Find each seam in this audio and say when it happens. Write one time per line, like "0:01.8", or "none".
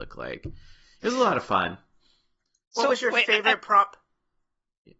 none